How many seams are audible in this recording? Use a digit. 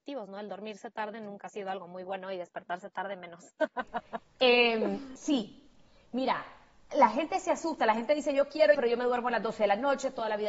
2